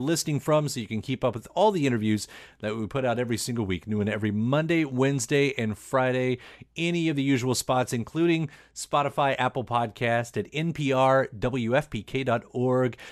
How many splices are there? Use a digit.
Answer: 0